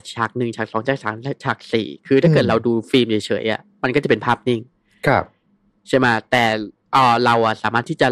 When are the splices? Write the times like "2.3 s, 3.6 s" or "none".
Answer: none